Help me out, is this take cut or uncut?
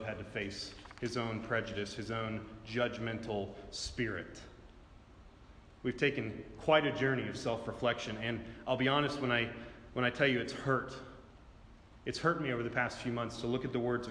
uncut